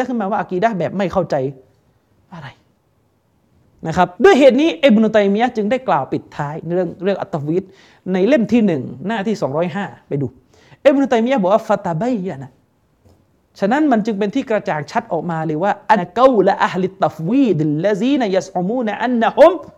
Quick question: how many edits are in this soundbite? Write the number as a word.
two